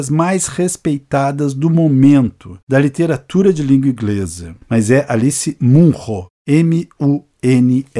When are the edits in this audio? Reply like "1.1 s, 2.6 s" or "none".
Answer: 4.6 s